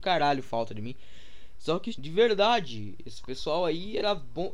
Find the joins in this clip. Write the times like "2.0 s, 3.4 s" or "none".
1.9 s

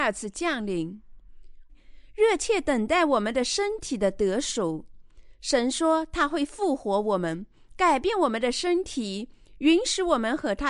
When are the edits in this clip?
1.7 s

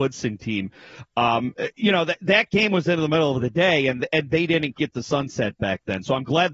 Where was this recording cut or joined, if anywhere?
4.7 s

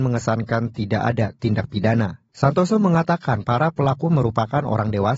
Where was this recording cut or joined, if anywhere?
2.3 s

